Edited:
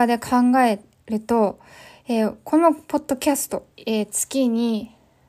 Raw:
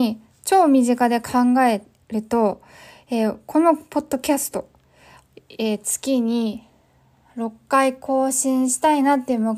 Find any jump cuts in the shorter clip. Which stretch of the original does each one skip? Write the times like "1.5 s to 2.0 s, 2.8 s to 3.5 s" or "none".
4.7 s to 5.4 s